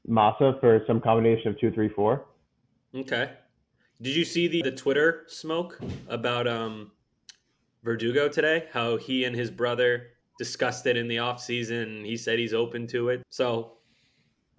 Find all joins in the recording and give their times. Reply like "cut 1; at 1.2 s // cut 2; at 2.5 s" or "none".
cut 1; at 4.6 s // cut 2; at 13.2 s